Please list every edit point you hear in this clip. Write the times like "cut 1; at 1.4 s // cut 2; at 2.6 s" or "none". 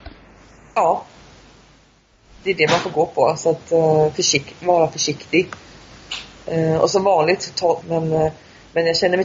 cut 1; at 7.8 s